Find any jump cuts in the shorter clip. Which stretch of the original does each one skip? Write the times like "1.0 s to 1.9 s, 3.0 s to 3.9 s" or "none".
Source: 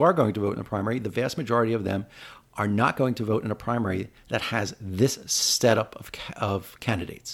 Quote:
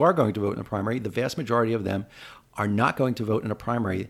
none